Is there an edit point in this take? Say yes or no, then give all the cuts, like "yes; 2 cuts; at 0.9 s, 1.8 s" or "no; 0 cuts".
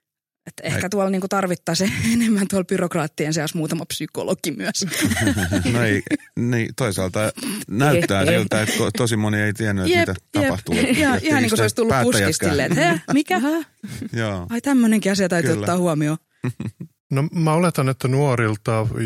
yes; 1 cut; at 5.6 s